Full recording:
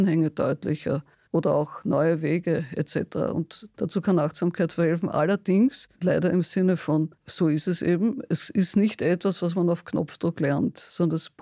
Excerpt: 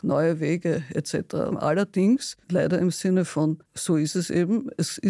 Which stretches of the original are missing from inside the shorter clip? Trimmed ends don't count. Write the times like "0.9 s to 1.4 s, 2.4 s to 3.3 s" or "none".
3.3 s to 5.0 s